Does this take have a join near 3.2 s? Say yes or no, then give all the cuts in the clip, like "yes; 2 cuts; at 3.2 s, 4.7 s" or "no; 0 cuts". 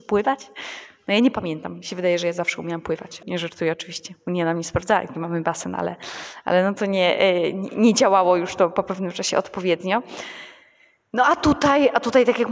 yes; 1 cut; at 3.2 s